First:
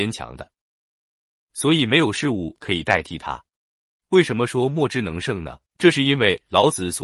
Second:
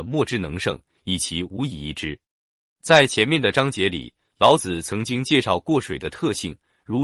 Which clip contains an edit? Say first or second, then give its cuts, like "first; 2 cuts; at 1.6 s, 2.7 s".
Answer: first; 1 cut; at 5.7 s